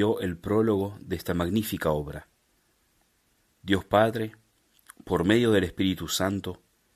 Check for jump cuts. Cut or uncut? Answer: uncut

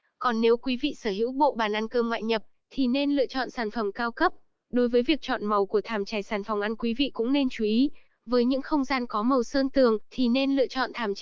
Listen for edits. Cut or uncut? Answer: cut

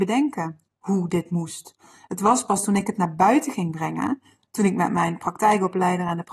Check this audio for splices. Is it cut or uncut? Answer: uncut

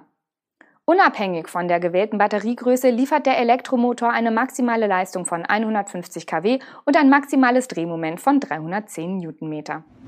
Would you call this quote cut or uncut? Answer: uncut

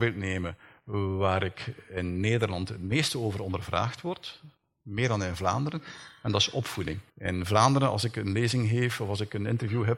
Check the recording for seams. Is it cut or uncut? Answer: cut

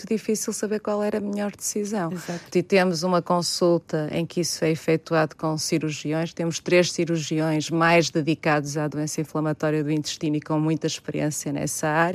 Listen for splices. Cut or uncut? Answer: uncut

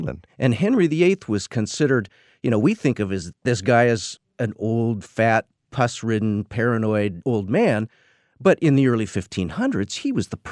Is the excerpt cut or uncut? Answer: uncut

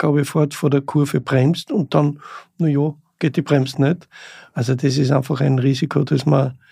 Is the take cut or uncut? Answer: cut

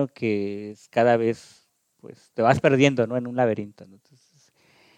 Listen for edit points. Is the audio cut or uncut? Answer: uncut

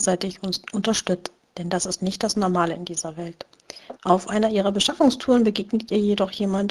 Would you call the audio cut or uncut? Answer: cut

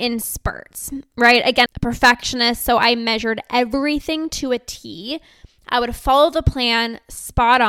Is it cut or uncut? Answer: cut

